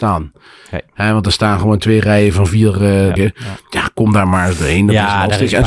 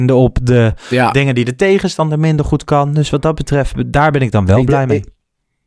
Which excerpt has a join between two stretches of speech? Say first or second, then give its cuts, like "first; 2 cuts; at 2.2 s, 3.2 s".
first; 1 cut; at 3.2 s